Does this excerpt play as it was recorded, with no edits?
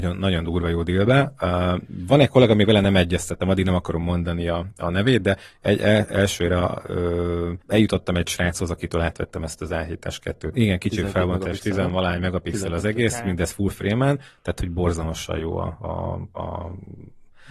no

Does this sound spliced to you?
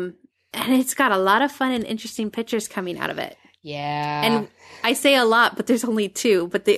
no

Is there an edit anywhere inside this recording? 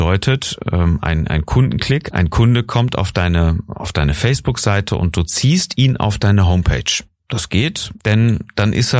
yes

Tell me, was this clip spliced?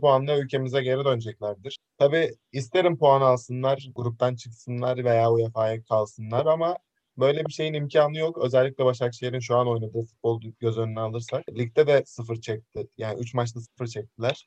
no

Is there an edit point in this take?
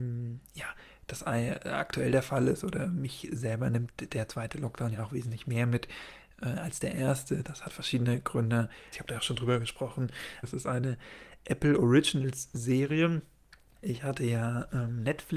yes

